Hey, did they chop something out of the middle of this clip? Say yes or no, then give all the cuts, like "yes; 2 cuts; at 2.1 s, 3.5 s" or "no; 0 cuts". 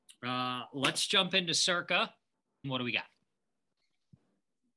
yes; 1 cut; at 2.6 s